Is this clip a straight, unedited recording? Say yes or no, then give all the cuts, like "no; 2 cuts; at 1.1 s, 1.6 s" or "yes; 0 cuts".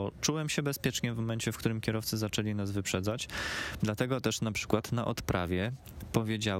no; 1 cut; at 3.8 s